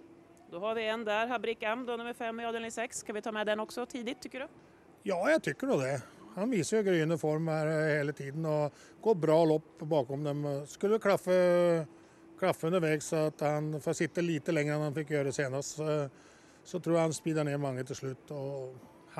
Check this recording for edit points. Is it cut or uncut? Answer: uncut